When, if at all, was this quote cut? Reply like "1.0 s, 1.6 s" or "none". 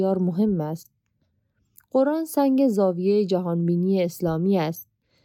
1.8 s